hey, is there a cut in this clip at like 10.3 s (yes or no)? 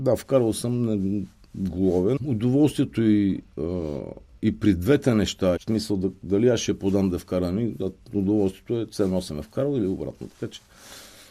no